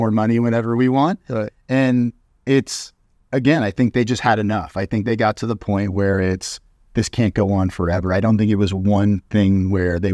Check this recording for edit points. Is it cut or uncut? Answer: uncut